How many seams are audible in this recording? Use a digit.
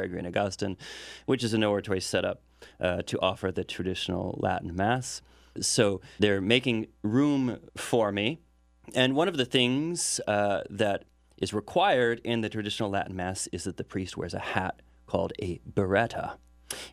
0